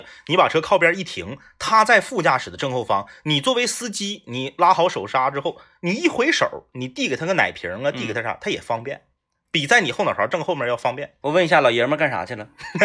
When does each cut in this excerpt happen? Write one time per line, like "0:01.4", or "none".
none